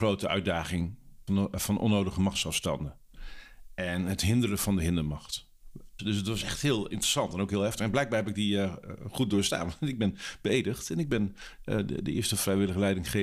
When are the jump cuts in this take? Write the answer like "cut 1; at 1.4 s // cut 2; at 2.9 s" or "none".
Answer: cut 1; at 1.3 s // cut 2; at 6.0 s